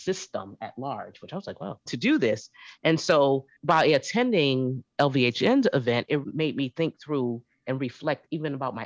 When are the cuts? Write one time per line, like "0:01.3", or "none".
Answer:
0:01.9
0:03.6
0:06.2